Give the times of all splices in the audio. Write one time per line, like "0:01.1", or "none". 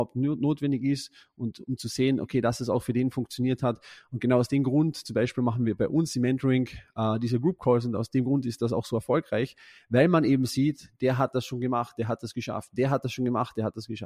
none

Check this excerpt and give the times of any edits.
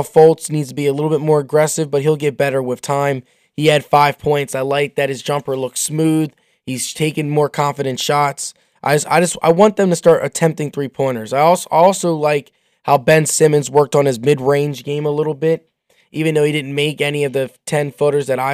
none

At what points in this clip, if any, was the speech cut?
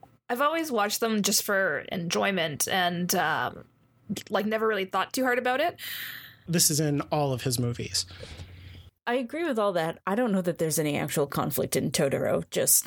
0:06.5
0:09.0

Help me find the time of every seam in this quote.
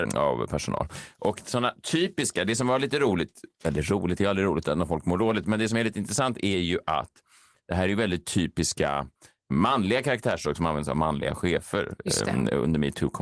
none

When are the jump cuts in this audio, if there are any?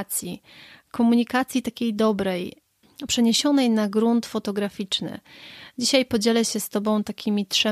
none

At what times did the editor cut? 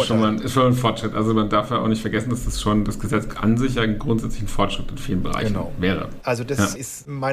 0:06.2

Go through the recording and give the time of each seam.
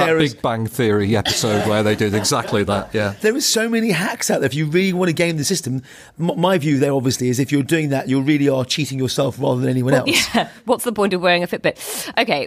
none

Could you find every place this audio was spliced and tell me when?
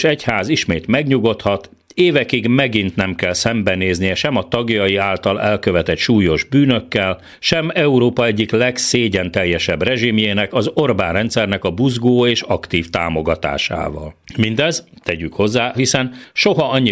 0:15.7

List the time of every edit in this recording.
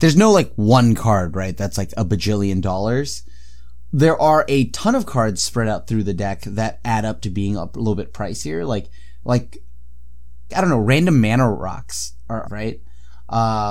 0:10.5
0:12.4

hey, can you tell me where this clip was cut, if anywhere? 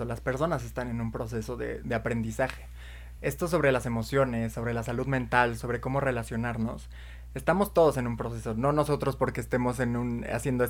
none

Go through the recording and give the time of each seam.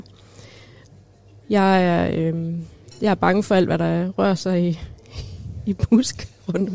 0:01.4

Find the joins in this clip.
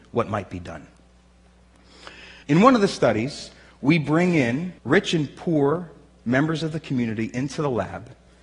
0:02.4
0:04.8

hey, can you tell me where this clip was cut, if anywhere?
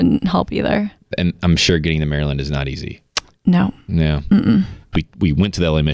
0:04.9

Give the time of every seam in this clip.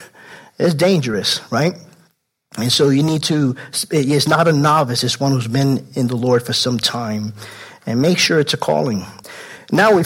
none

